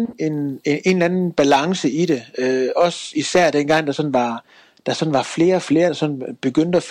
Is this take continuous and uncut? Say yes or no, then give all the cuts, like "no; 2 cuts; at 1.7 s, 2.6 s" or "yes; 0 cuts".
yes; 0 cuts